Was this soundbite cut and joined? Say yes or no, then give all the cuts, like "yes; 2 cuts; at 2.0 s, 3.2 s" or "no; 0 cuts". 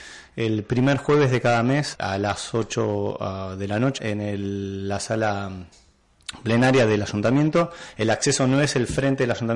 yes; 2 cuts; at 1.9 s, 4.0 s